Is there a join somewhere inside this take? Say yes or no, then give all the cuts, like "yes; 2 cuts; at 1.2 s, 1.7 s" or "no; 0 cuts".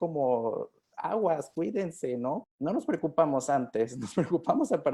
yes; 1 cut; at 2.4 s